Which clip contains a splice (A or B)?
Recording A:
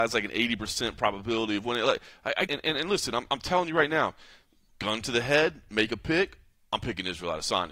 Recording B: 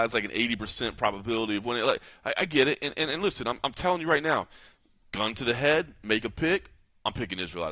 A